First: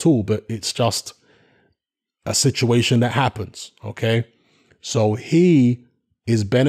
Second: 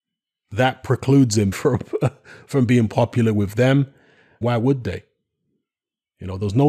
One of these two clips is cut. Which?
second; 2 cuts; at 1.5 s, 4.4 s

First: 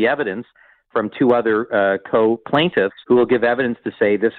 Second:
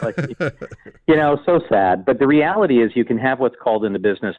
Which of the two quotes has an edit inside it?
first; 1 cut; at 3.0 s

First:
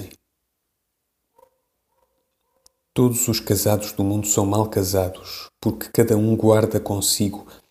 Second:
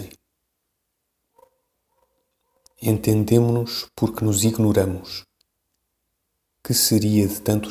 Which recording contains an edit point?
second; 1 cut; at 2.7 s

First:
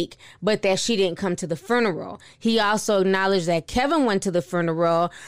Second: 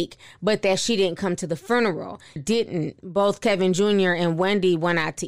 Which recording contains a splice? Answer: second; 1 cut; at 2.4 s

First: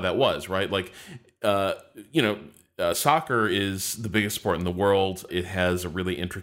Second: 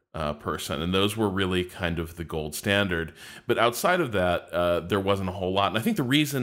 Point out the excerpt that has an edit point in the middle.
first; 1 cut; at 5.3 s

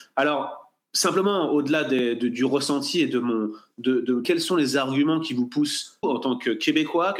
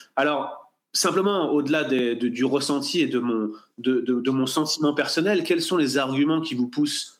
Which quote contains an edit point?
first; 2 cuts; at 4.2 s, 6.0 s

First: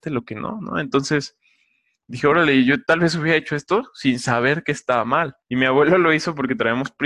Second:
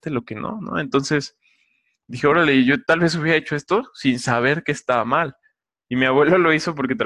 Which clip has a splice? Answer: first; 1 cut; at 5.4 s

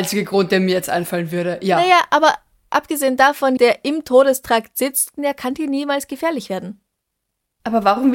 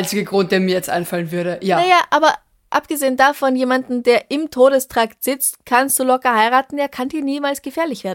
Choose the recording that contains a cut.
first; 2 cuts; at 3.6 s, 5.2 s

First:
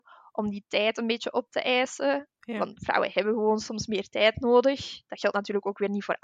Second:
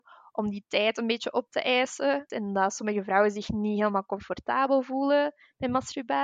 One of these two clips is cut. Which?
second; 1 cut; at 2.3 s

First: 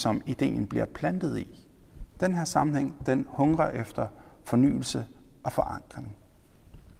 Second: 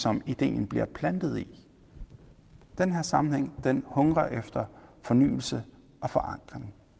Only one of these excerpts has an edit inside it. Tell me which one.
first; 1 cut; at 2.1 s

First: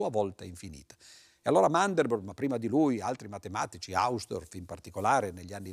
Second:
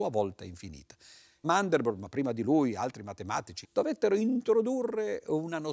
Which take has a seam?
second; 2 cuts; at 1.4 s, 3.6 s

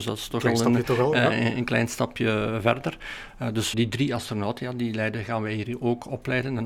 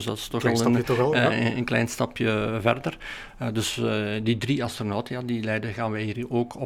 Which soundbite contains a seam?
first; 1 cut; at 3.7 s

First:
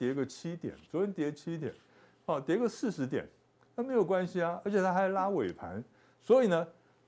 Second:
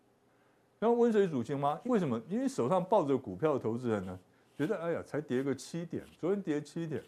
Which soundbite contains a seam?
second; 1 cut; at 1.8 s

